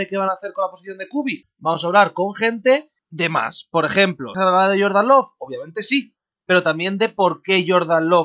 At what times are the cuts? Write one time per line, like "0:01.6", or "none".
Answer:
0:01.4
0:03.0
0:04.3